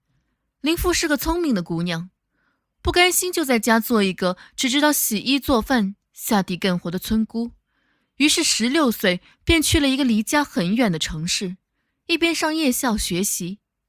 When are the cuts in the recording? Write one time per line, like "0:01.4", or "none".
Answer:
none